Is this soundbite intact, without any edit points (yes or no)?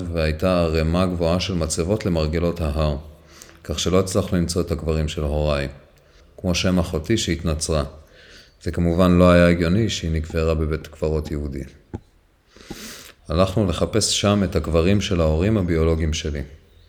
no